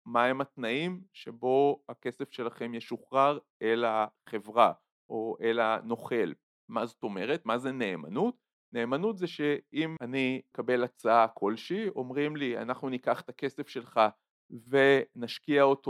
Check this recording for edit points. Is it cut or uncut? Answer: uncut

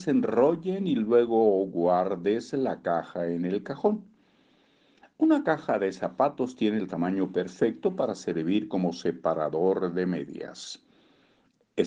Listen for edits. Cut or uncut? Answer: uncut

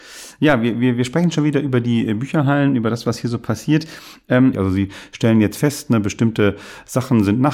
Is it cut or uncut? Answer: cut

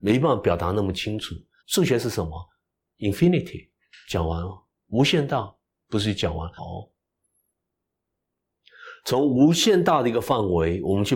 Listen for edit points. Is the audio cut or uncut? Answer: cut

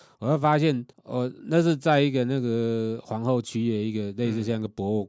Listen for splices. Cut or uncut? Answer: cut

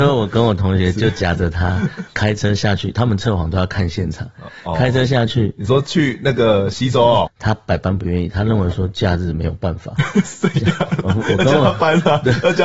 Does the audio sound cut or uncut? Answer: cut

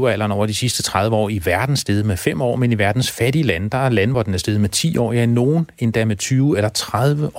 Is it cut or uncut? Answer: uncut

